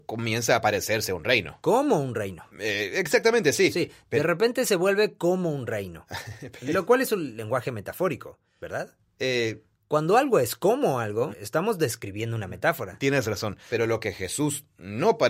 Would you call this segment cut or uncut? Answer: cut